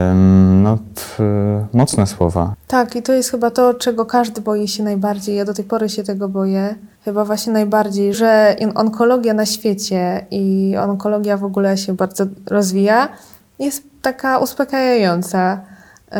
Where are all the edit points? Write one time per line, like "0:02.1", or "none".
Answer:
0:02.5
0:07.0
0:08.1

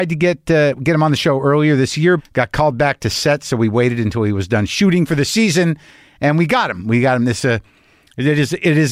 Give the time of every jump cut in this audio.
0:02.2

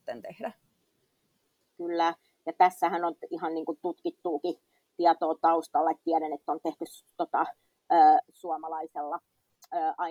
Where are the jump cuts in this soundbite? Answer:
none

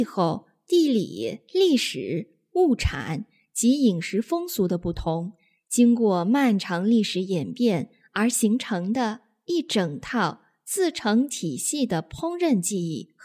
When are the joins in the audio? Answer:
none

